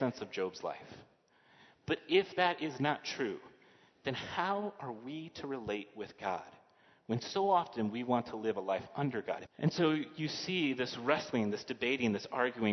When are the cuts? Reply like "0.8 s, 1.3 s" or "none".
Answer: 9.5 s